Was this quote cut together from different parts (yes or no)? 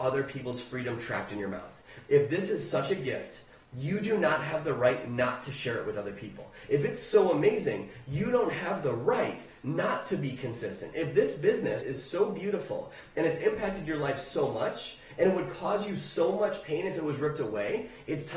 yes